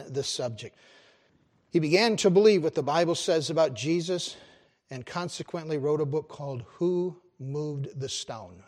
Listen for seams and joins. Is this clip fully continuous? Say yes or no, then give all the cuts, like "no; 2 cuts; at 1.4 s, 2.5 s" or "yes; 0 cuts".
yes; 0 cuts